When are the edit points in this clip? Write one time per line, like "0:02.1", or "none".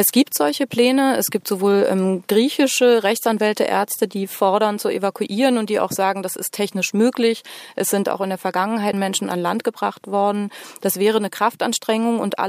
0:08.9